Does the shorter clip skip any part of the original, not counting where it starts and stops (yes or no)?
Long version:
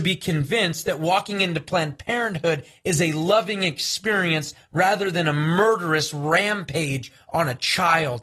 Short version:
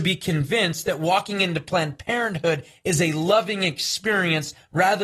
no